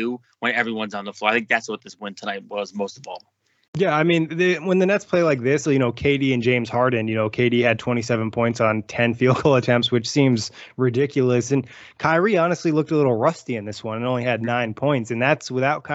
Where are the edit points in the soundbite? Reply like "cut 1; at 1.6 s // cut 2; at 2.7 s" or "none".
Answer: cut 1; at 5.6 s // cut 2; at 11.5 s